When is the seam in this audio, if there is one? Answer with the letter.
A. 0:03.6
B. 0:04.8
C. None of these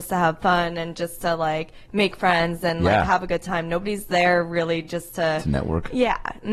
C